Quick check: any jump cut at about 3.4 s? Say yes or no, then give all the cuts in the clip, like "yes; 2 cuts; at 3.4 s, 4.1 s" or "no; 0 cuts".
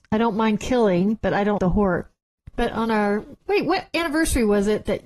yes; 2 cuts; at 1.6 s, 3.4 s